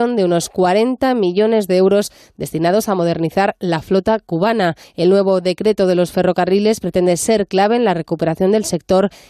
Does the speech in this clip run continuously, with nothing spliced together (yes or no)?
yes